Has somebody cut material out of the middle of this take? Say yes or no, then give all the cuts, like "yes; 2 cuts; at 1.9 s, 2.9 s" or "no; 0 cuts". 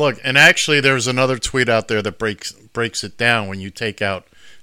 no; 0 cuts